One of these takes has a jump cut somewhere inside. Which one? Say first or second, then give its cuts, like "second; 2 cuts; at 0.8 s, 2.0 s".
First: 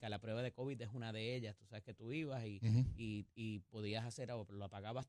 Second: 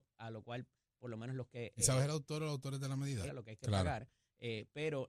second; 1 cut; at 3.3 s